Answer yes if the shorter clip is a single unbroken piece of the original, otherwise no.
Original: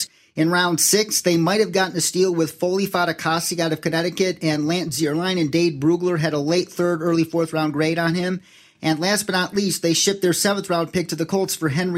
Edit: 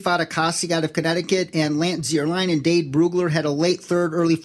yes